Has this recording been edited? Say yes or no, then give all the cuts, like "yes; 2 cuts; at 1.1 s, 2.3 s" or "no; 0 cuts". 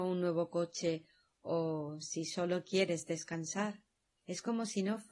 yes; 1 cut; at 4.2 s